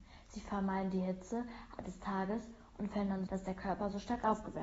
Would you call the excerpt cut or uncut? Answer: cut